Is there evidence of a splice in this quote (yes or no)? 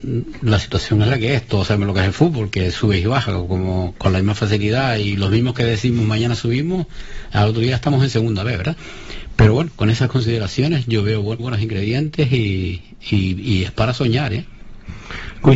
yes